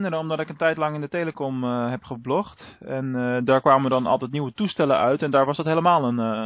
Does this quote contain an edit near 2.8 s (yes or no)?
no